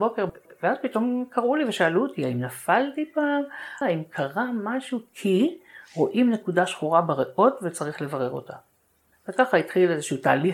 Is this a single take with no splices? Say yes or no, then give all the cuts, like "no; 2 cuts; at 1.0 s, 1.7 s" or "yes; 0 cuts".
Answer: no; 1 cut; at 3.8 s